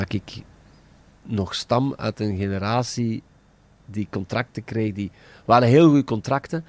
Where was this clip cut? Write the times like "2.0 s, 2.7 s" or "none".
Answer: none